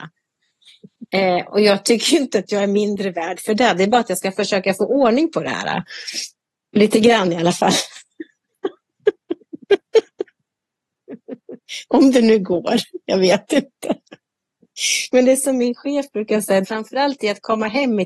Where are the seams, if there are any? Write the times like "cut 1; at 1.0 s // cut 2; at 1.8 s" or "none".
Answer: cut 1; at 16.6 s